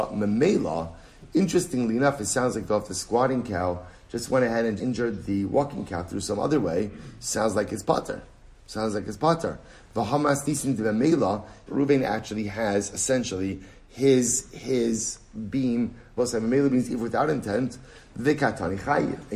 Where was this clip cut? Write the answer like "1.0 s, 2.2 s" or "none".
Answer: 4.8 s, 11.7 s, 16.2 s